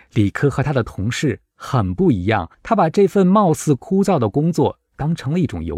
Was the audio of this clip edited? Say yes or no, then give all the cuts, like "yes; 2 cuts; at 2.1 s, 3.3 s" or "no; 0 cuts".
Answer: yes; 1 cut; at 2.5 s